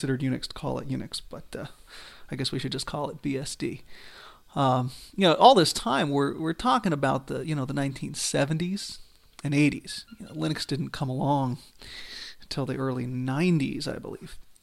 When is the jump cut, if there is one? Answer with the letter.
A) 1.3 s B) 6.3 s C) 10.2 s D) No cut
D